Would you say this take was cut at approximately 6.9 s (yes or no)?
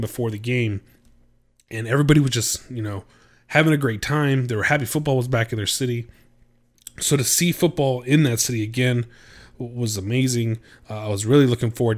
no